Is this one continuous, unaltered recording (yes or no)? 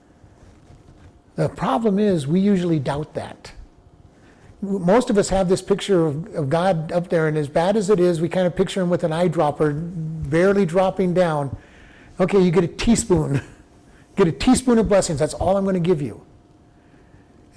yes